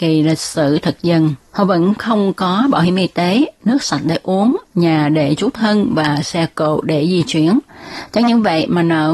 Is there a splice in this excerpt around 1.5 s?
yes; 1 cut; at 1.5 s

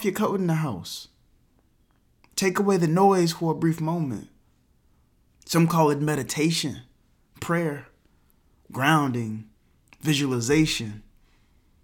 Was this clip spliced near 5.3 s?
yes; 1 cut; at 5.3 s

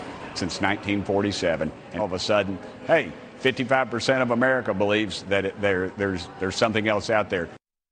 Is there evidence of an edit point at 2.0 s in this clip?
yes; 2 cuts; at 2.0 s, 5.2 s

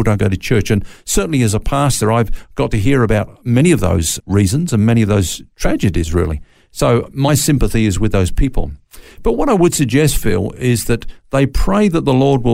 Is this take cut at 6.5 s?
no; 1 cut; at 4.2 s

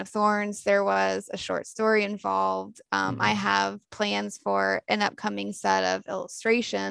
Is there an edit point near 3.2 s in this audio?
no; 0 cuts

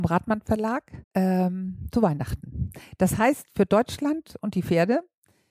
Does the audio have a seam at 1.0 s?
yes; 1 cut; at 1.0 s

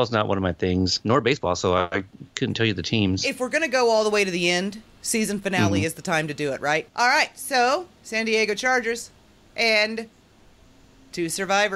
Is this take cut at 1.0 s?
no; 1 cut; at 6.9 s

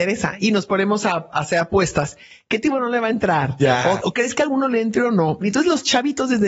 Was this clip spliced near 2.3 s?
no; 2 cuts; at 4.0 s, 5.4 s

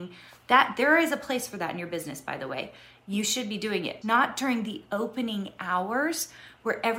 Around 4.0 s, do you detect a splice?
yes; 1 cut; at 4.0 s

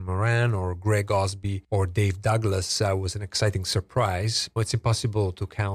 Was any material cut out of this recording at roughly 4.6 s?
yes; 1 cut; at 4.6 s

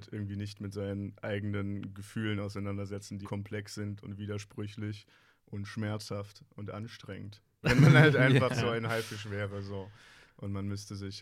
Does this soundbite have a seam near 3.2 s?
yes; 2 cuts; at 3.2 s, 7.6 s

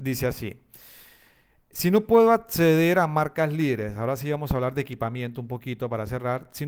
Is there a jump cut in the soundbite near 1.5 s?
no; 0 cuts

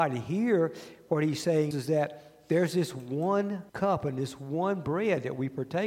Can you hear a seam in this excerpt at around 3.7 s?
yes; 2 cuts; at 1.7 s, 3.7 s

